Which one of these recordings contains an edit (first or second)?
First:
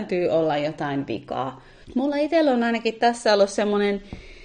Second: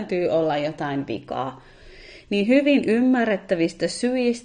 first